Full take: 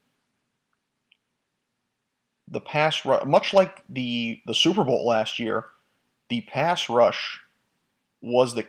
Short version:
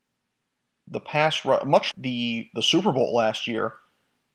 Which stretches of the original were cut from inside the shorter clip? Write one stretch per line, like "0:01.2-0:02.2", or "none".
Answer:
0:03.5-0:03.8